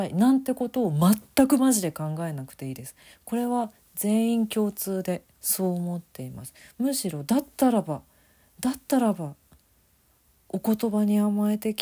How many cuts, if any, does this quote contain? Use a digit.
1